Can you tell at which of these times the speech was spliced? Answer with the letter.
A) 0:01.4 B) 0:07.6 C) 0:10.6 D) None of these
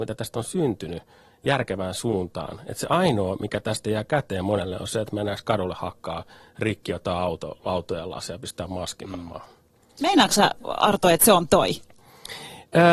D